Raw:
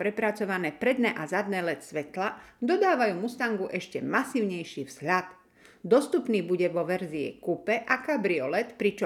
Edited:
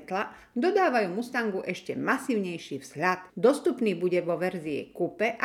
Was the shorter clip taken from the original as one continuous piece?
no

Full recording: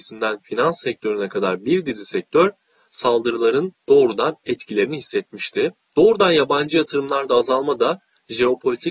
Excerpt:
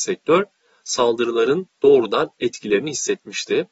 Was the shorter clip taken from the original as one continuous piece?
yes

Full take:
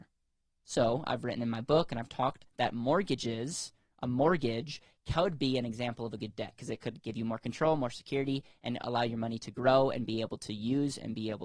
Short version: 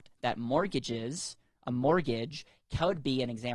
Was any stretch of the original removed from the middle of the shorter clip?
no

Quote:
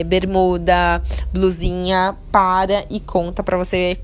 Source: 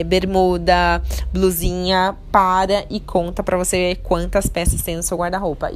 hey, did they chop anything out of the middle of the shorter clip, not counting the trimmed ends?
no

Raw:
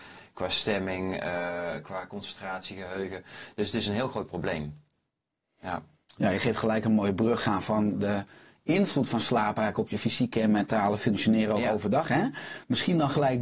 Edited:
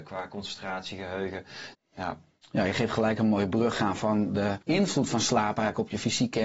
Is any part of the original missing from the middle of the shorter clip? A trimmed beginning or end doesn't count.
yes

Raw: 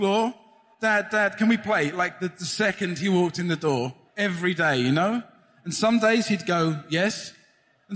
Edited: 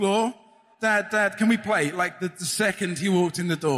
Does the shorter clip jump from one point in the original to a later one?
no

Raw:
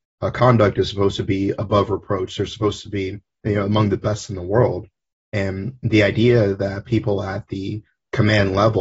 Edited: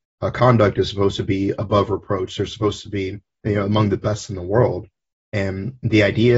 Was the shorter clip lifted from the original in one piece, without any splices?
yes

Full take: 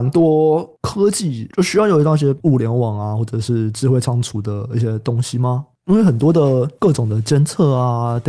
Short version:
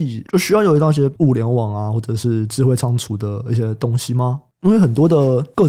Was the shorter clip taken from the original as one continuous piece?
yes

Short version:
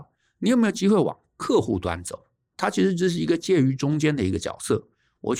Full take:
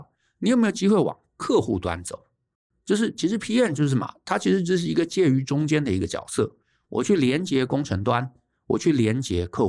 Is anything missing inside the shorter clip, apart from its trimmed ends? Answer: yes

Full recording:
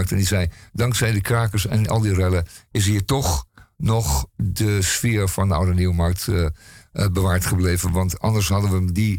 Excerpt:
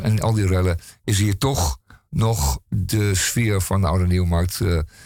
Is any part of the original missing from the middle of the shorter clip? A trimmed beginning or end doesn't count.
no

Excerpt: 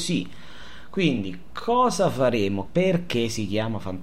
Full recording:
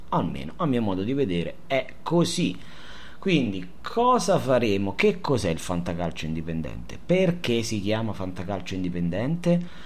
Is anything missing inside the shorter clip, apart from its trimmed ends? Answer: yes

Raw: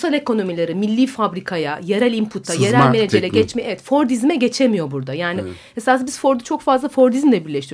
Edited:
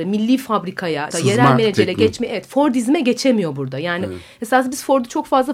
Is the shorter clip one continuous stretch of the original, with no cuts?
no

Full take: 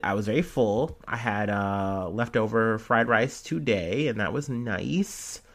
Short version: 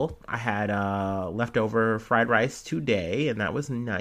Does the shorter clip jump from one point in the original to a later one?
no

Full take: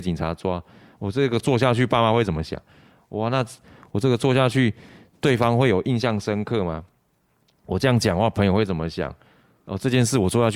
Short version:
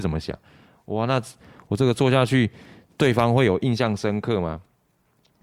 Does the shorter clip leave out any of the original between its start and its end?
no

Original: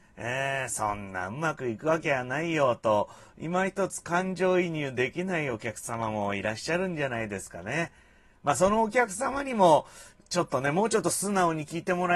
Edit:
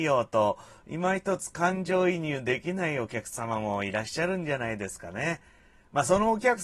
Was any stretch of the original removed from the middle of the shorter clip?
no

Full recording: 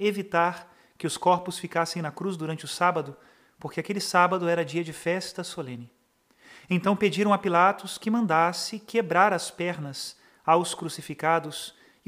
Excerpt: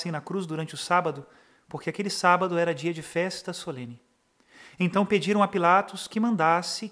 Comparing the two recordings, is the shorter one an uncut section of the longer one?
yes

